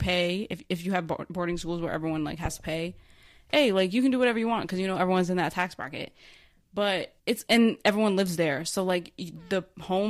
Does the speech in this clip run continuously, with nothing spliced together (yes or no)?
no